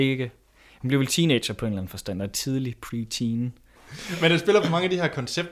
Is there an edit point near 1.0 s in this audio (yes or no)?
no